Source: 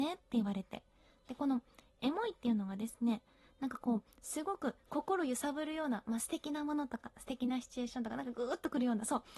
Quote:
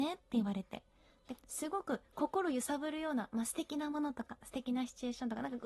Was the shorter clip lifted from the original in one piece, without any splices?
no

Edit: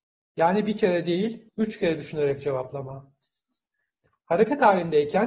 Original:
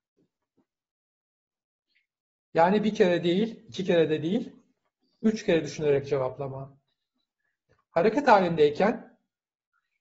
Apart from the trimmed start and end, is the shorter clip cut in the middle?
yes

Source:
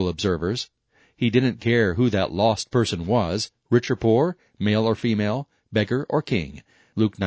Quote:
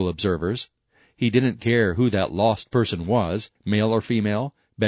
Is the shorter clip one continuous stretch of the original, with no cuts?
no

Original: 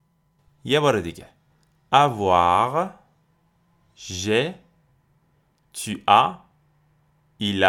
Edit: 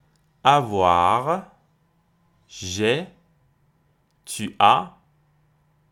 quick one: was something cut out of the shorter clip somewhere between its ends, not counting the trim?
no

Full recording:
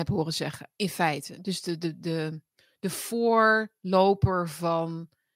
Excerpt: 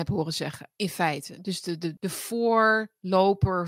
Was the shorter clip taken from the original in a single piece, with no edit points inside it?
no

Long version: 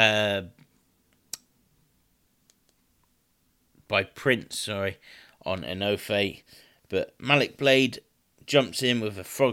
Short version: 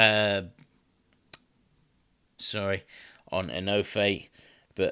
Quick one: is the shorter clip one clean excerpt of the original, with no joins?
no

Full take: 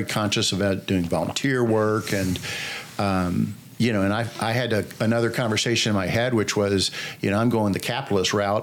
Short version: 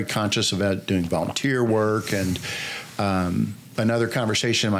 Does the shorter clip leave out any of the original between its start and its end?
yes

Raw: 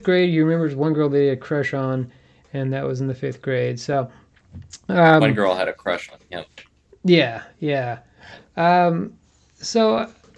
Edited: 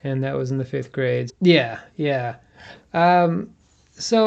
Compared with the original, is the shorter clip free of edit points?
no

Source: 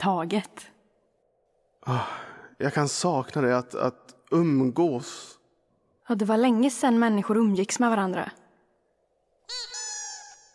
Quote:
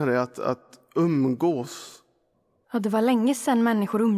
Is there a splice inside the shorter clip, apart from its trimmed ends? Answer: no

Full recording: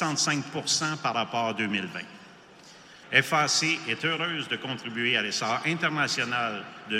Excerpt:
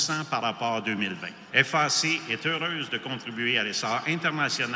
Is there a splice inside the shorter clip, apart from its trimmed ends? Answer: yes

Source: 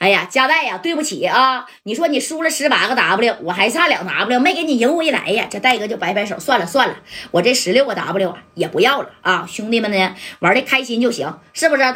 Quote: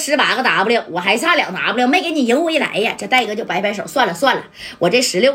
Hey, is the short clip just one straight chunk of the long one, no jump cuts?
yes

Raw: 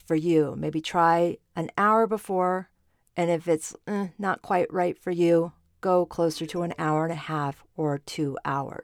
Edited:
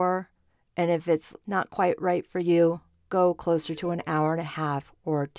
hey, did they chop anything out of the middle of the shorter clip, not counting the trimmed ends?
yes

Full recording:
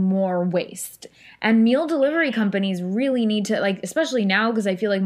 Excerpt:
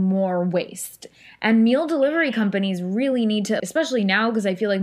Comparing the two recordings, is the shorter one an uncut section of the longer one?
no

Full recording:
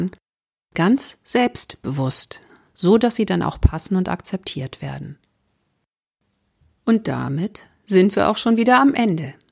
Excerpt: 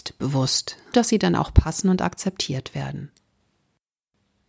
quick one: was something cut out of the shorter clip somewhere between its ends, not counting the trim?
yes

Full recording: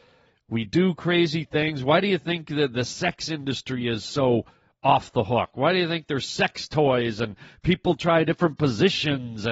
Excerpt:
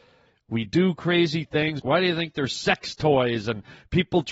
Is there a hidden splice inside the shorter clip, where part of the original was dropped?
yes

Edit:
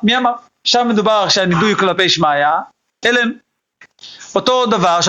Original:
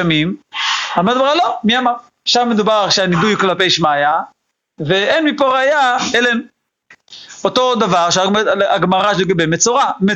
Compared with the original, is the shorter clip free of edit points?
no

